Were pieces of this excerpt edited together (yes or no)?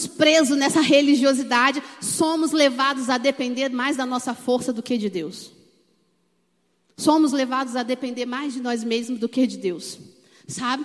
no